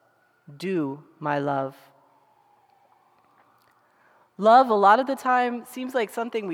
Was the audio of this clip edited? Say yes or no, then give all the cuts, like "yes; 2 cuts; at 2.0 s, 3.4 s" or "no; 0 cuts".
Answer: no; 0 cuts